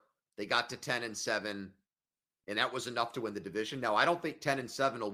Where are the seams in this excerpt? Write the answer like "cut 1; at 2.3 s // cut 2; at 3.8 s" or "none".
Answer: none

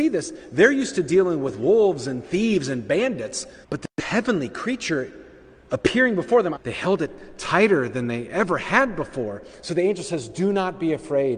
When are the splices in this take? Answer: cut 1; at 3.6 s // cut 2; at 6.6 s

